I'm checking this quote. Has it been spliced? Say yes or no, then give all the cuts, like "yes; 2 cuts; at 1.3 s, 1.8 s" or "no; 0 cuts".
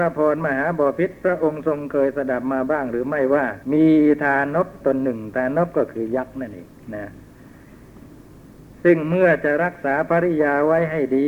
yes; 1 cut; at 3.6 s